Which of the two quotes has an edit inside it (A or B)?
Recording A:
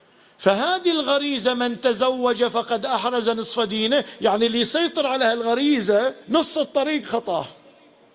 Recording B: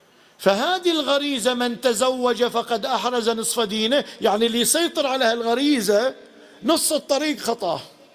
A